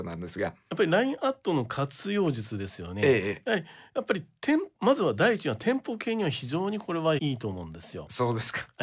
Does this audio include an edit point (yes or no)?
yes